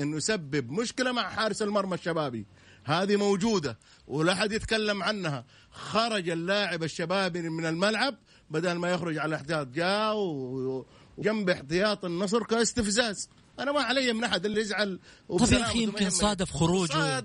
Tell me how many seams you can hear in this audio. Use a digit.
2